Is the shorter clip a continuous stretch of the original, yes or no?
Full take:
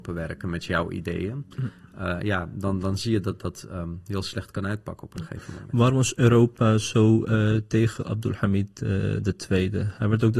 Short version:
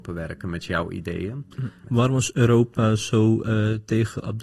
no